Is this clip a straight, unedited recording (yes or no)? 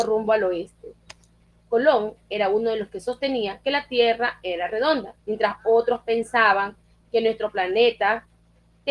no